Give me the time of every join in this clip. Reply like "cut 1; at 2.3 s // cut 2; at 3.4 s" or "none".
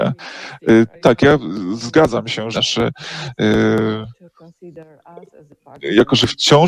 cut 1; at 1.0 s // cut 2; at 2.5 s